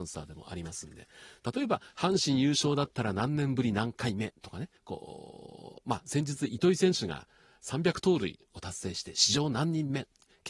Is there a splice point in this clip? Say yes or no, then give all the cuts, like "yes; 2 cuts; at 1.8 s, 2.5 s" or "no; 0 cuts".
yes; 1 cut; at 4.8 s